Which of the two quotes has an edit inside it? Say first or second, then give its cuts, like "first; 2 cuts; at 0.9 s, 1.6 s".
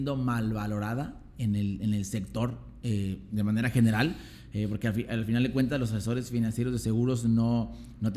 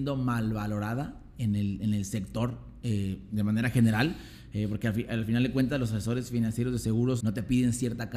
second; 1 cut; at 7.2 s